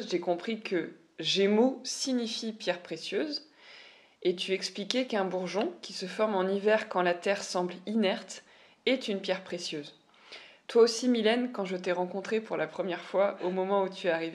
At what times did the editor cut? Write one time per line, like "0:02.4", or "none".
none